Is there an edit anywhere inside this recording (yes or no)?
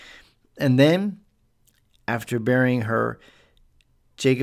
no